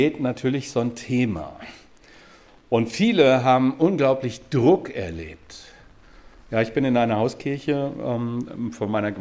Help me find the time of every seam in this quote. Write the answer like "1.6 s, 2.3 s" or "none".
none